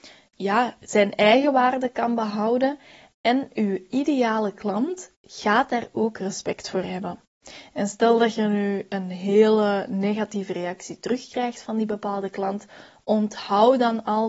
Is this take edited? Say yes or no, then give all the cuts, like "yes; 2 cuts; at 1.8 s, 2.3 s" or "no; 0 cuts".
no; 0 cuts